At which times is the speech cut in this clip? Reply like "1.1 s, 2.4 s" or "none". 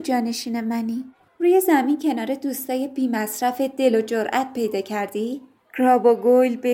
1.3 s